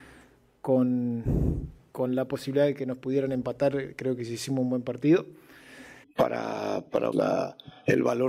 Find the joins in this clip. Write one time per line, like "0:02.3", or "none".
0:06.0
0:07.1